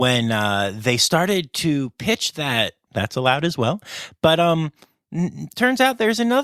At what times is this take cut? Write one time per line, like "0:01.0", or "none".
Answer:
0:02.9

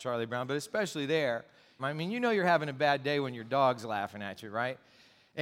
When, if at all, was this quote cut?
0:01.8

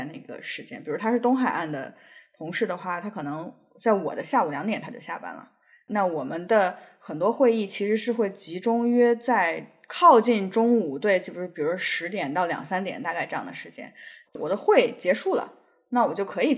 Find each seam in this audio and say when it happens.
0:14.3

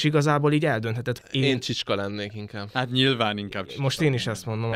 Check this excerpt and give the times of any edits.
0:01.2

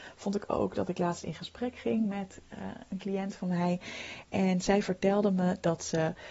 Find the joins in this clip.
none

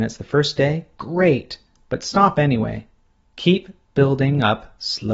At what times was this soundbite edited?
0:03.3

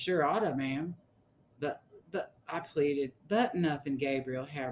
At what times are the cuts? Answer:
0:03.2

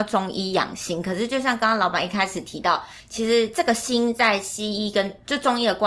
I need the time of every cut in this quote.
none

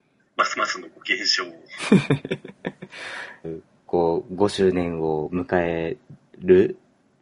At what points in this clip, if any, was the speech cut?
0:03.4

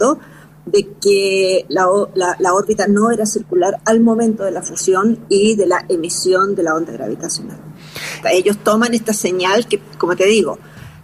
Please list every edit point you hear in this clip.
0:08.2

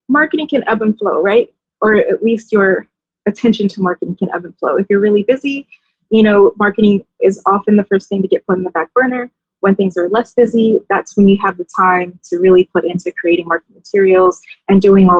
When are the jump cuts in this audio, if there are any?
none

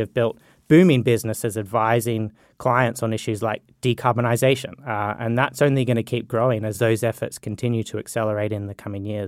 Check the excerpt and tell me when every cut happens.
none

